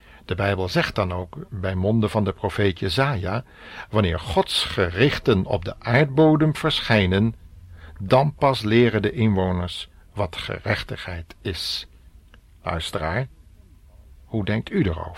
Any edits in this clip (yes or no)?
no